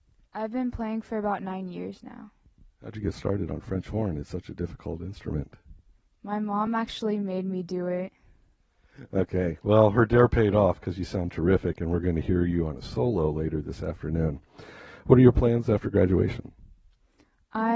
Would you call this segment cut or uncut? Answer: uncut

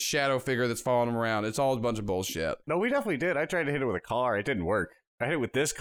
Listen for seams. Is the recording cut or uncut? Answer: uncut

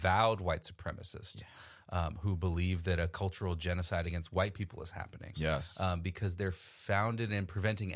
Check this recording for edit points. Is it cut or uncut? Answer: cut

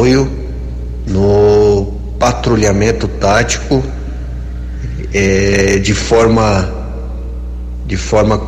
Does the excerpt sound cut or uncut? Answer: uncut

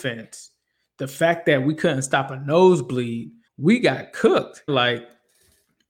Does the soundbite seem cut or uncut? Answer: cut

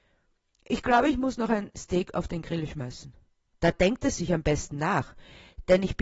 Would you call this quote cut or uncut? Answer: cut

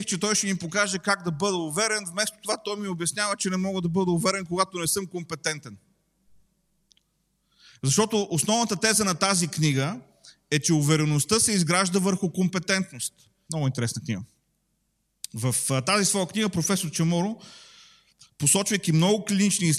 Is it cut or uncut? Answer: cut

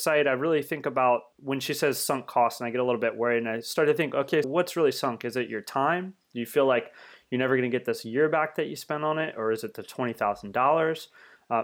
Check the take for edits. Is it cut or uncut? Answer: cut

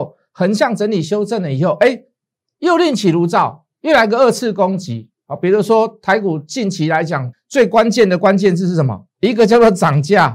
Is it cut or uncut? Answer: cut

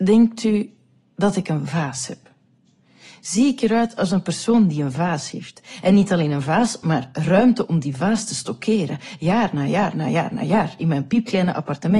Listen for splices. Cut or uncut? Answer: uncut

